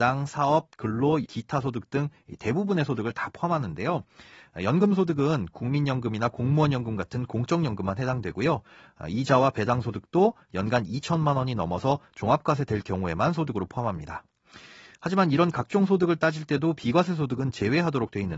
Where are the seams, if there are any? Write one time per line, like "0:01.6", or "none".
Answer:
0:01.2